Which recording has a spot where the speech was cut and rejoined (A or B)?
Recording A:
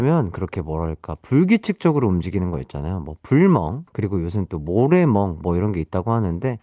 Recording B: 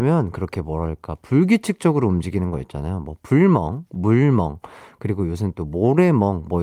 A